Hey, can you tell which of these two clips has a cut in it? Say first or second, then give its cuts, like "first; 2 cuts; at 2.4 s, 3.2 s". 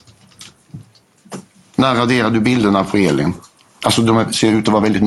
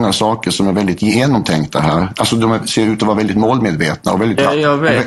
first; 1 cut; at 3.8 s